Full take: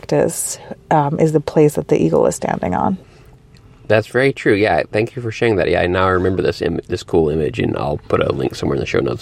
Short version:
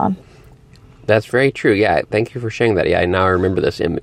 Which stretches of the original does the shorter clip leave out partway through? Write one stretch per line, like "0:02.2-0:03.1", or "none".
none